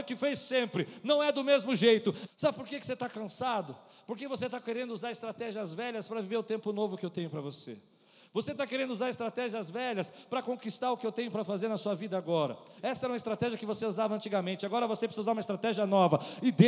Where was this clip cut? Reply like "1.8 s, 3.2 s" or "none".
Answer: 2.3 s, 12.8 s